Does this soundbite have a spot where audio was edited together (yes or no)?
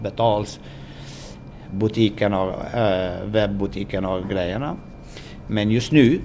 no